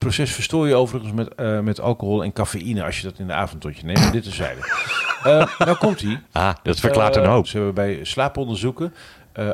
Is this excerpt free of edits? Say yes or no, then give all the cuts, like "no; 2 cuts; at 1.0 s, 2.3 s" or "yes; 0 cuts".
no; 1 cut; at 7.4 s